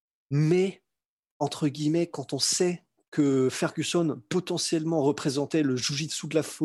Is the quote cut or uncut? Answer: uncut